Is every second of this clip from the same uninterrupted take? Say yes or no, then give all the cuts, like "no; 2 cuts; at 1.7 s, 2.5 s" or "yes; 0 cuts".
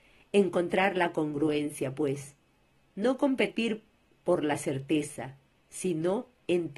yes; 0 cuts